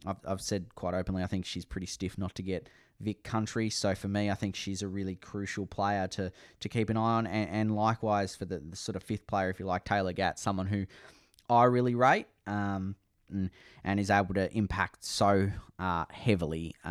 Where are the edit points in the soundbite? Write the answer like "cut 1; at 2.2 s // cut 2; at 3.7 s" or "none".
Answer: cut 1; at 13.3 s